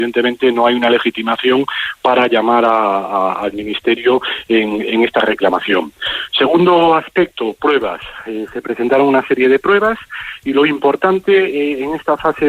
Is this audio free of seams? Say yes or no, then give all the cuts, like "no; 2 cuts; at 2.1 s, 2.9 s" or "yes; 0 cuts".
yes; 0 cuts